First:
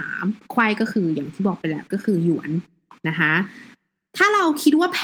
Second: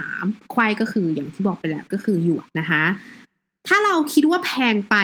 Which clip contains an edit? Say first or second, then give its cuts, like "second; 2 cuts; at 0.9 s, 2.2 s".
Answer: second; 1 cut; at 2.4 s